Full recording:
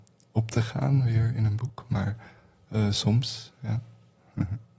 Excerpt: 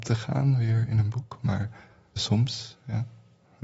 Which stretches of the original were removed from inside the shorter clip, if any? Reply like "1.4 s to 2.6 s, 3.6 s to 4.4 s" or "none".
2.6 s to 2.9 s